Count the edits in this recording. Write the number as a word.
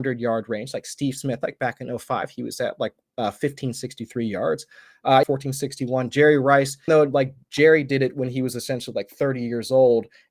two